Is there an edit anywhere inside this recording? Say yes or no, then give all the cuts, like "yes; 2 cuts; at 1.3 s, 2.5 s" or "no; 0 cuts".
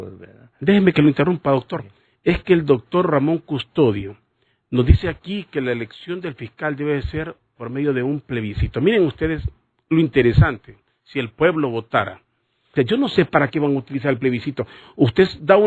yes; 1 cut; at 12.8 s